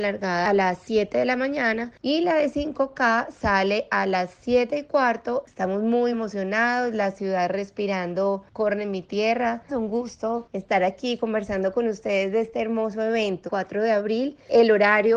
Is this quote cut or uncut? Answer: cut